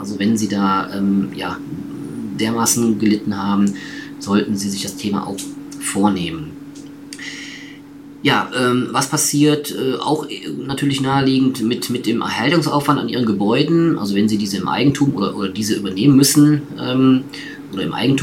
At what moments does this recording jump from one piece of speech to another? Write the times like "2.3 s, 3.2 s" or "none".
none